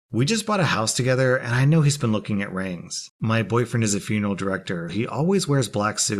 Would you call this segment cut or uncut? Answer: cut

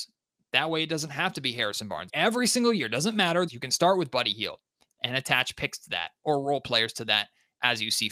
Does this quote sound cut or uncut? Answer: cut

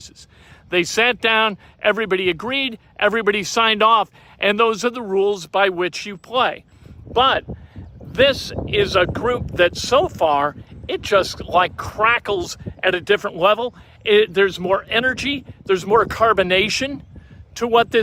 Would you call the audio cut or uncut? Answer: cut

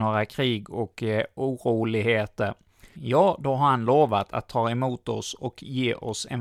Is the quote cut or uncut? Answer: cut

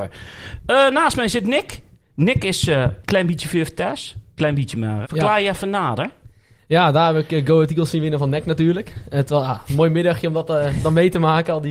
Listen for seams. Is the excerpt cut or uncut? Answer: cut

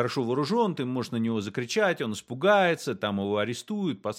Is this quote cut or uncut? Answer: uncut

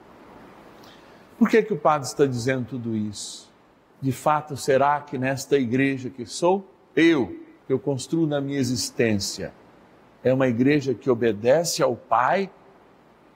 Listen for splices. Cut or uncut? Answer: cut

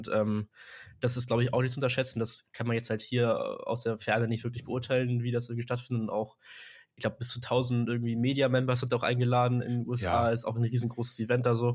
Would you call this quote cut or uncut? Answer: uncut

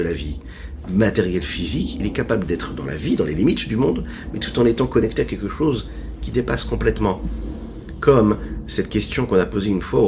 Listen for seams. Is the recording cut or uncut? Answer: uncut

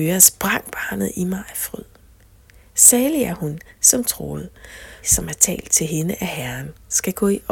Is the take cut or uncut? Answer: cut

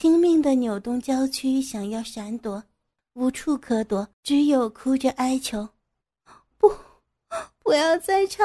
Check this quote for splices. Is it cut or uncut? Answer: cut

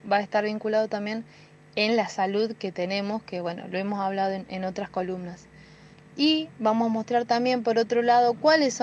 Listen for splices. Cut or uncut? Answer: uncut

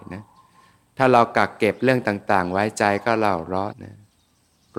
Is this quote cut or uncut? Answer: cut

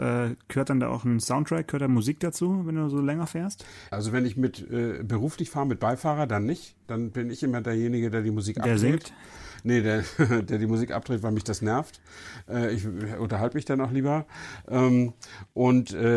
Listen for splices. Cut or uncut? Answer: cut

